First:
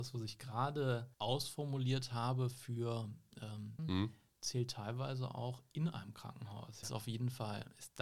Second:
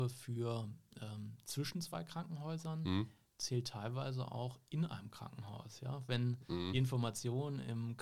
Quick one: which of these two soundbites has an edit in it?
first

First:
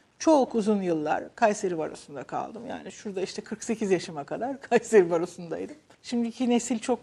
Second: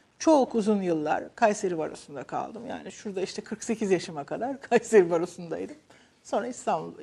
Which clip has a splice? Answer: first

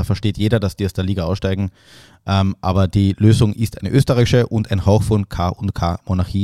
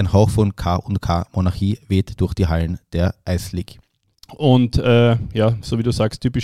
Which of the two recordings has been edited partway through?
second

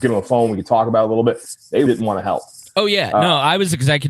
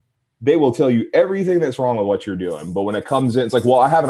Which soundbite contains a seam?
first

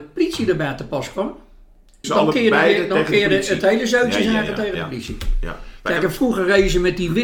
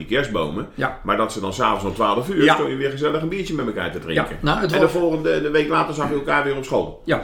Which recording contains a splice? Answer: first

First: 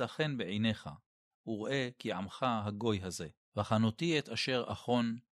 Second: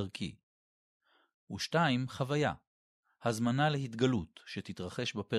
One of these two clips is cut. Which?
first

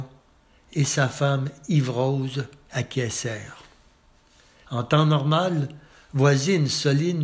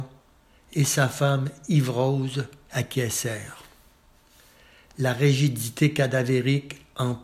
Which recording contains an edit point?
first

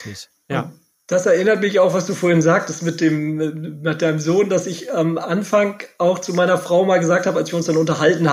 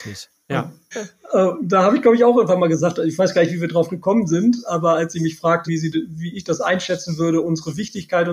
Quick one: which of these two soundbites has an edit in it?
second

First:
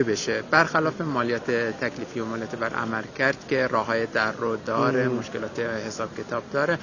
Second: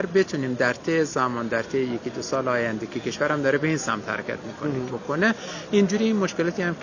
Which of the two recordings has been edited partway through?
second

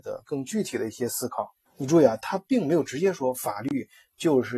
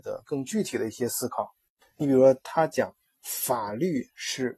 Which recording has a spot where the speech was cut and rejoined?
first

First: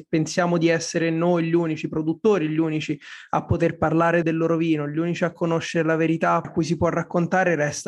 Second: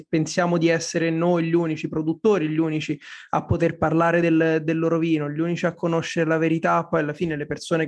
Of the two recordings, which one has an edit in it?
first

